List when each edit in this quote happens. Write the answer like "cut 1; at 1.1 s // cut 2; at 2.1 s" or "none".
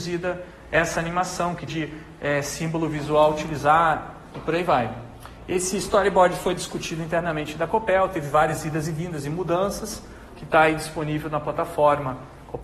cut 1; at 1.7 s // cut 2; at 10.3 s